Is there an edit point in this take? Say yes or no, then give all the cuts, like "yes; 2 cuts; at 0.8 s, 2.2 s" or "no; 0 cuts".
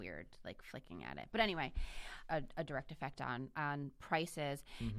yes; 2 cuts; at 2.3 s, 3.5 s